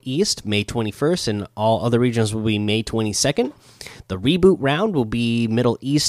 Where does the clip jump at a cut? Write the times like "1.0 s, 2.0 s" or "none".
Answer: none